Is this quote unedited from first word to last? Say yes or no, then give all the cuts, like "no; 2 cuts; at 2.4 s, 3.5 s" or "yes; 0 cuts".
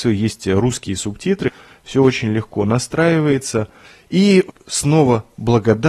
yes; 0 cuts